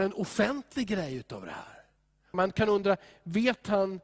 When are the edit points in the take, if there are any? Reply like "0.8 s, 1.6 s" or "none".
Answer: 2.3 s